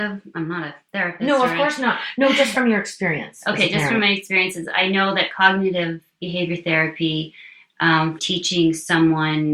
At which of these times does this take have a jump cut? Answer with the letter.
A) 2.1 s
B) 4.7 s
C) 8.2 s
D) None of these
C